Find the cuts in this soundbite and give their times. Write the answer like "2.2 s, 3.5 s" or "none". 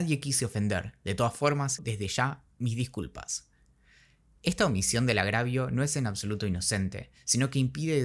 1.8 s